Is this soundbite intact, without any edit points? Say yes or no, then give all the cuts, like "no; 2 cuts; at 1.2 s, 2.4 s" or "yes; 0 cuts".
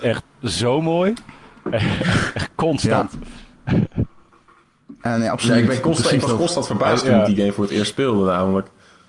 yes; 0 cuts